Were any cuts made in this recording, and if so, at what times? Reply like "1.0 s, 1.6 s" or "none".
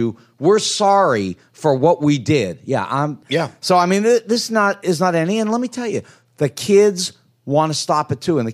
3.2 s